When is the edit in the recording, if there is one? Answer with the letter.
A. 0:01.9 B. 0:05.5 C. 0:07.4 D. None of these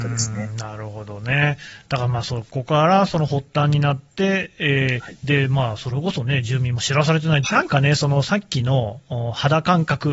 C